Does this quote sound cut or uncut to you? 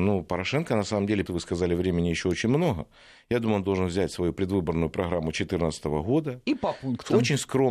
cut